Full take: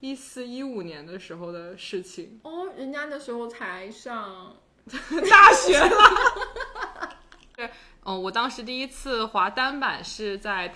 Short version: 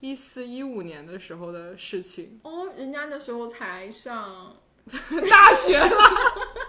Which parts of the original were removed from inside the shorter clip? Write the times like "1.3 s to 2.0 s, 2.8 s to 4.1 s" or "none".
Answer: none